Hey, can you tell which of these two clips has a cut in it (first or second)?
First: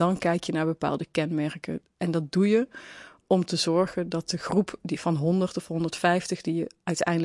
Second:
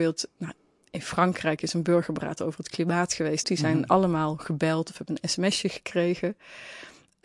second